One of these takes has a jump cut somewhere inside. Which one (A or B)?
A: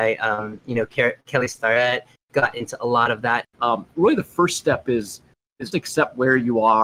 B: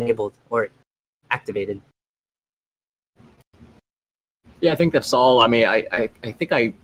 A